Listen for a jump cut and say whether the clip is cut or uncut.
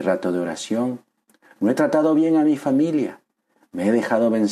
uncut